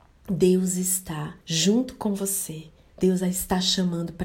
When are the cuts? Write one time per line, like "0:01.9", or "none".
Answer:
0:01.4
0:02.9